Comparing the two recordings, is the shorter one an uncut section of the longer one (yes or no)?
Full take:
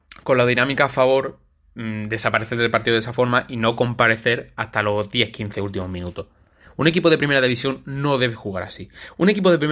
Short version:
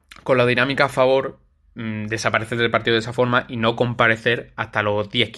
yes